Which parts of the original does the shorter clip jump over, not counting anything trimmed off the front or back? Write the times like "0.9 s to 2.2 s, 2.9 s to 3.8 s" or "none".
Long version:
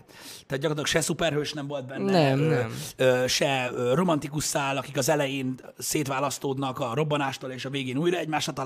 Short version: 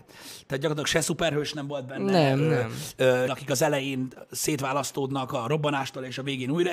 3.3 s to 4.7 s